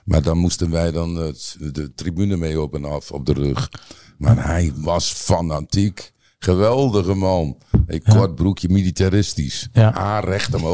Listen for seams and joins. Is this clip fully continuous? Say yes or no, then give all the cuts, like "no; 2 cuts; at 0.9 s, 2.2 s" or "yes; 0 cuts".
yes; 0 cuts